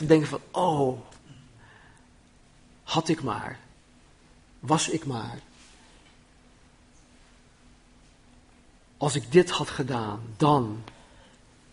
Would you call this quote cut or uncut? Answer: uncut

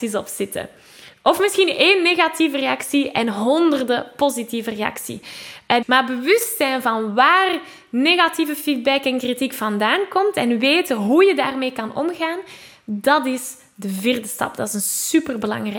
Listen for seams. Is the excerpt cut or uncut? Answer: cut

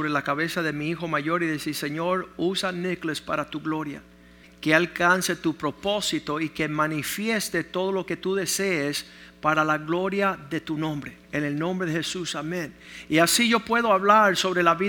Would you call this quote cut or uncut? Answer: cut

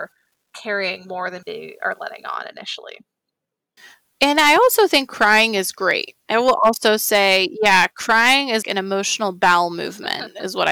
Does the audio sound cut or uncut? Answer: cut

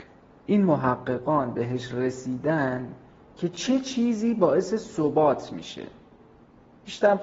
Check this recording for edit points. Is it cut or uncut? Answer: uncut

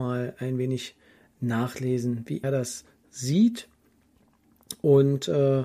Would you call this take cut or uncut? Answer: cut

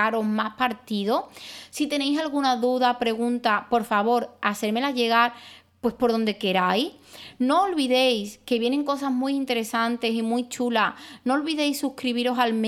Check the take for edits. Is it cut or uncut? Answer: uncut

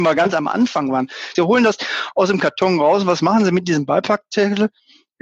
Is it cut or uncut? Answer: cut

